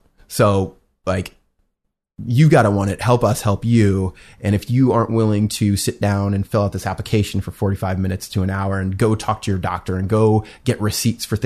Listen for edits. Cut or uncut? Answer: uncut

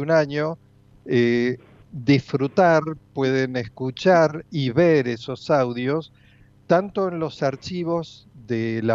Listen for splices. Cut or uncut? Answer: cut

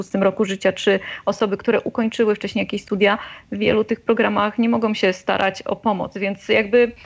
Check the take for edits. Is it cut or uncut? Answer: uncut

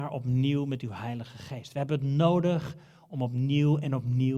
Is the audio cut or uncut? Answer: uncut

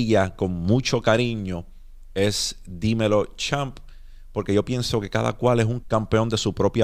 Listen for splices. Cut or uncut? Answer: cut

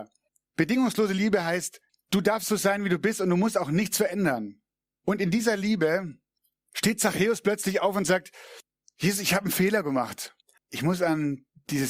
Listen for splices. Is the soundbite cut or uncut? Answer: cut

